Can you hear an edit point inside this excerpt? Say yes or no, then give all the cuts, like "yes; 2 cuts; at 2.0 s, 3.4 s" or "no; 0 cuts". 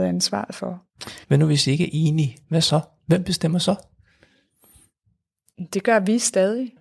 yes; 1 cut; at 1.2 s